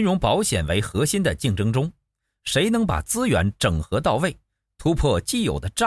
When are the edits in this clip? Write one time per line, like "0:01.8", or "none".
none

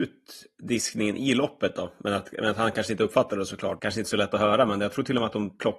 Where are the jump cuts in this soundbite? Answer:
0:03.8

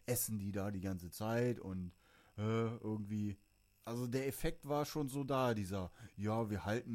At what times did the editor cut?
none

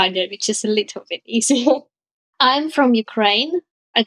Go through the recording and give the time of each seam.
0:01.9

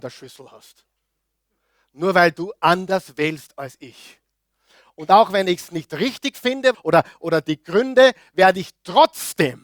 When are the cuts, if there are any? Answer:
0:06.7

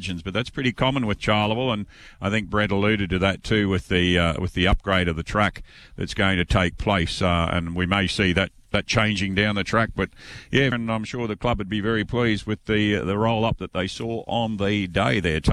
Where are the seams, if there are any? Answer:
0:10.7

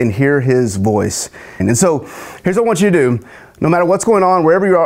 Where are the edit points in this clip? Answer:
0:01.6

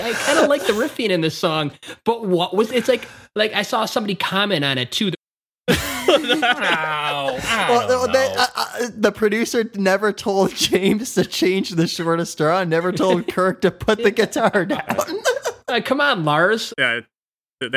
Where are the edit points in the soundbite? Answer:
0:05.1
0:16.7

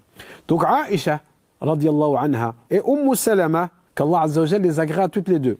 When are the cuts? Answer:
0:02.6
0:03.9

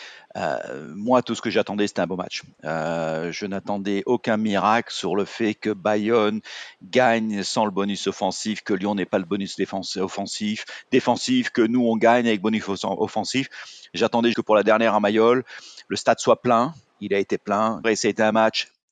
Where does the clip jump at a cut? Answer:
0:14.3
0:17.8

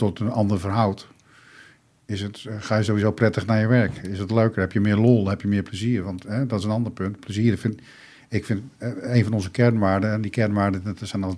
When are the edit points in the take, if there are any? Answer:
none

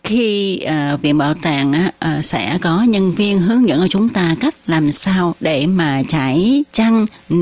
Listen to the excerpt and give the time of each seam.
0:01.0

